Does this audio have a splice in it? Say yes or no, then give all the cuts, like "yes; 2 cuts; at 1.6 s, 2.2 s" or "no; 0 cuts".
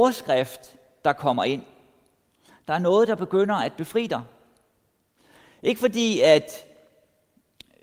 no; 0 cuts